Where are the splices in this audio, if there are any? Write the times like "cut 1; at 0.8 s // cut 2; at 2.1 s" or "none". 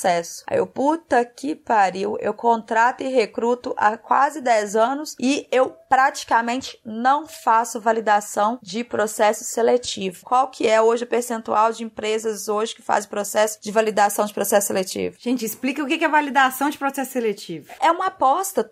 cut 1; at 10.2 s // cut 2; at 17.8 s